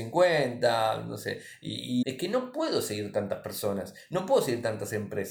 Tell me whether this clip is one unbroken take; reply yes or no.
no